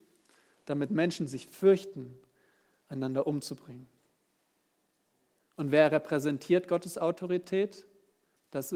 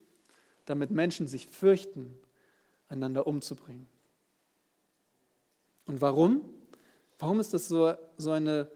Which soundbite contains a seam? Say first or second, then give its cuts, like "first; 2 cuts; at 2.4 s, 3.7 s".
first; 1 cut; at 5.4 s